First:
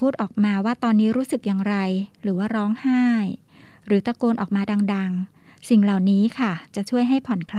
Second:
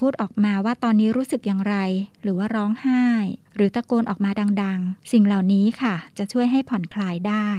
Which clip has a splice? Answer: second; 2 cuts; at 3.4 s, 5.0 s

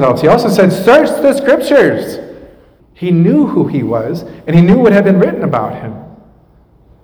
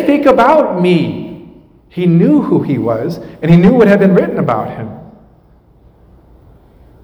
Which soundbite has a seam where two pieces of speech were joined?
first; 1 cut; at 2.8 s

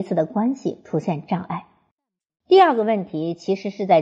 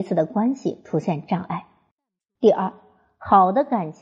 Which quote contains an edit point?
first; 1 cut; at 2.3 s

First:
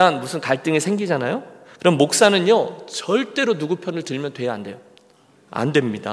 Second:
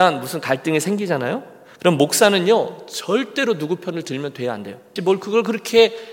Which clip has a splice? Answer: second; 1 cut; at 5.0 s

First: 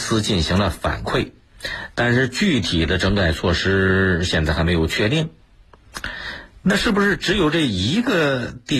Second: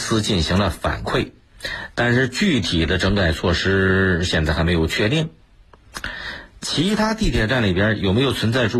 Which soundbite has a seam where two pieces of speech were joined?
second; 1 cut; at 6.6 s

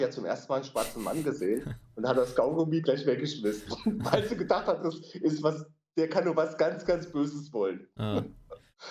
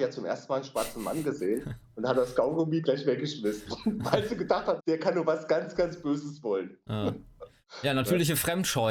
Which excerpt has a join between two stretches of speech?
second; 1 cut; at 4.8 s

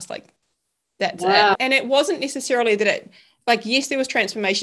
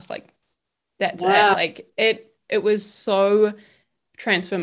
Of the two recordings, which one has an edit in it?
first; 1 cut; at 1.6 s

